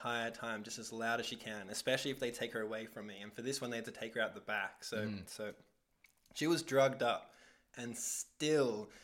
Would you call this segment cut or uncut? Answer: cut